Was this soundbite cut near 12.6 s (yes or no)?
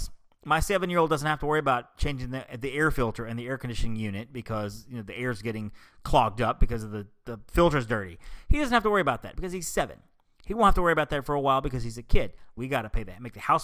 yes